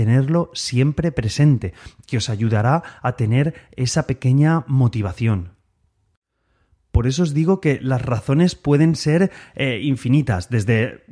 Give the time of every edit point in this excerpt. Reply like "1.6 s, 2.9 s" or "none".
none